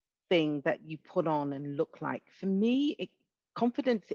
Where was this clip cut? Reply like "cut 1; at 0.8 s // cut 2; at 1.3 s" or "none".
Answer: none